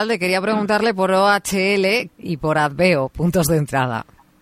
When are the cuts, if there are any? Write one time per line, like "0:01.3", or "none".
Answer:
0:02.1